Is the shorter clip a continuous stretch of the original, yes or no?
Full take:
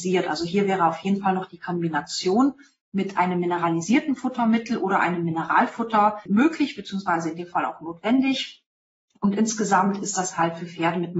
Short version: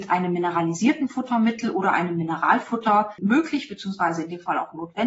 yes